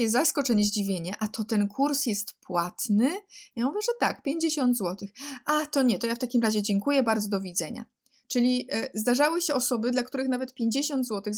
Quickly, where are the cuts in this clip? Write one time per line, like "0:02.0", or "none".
none